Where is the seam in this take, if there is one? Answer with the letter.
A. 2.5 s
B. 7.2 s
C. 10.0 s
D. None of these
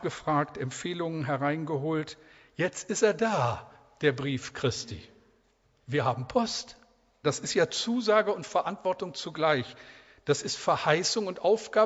B